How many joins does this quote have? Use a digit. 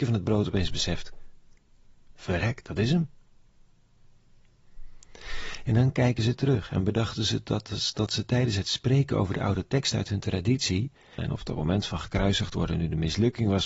1